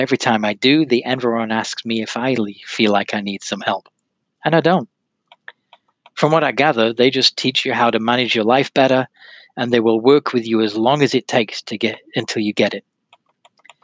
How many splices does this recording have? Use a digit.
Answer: 0